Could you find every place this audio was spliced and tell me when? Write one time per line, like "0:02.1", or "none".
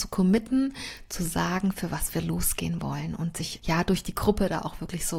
0:03.6